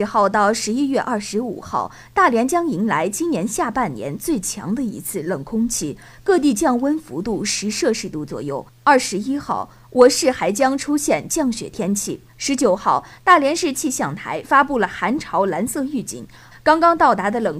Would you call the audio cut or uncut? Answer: cut